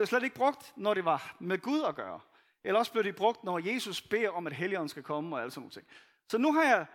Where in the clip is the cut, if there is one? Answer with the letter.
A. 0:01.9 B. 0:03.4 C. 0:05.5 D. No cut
D